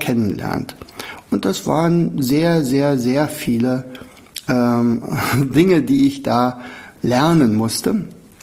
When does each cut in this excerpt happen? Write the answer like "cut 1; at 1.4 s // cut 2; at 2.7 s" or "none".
none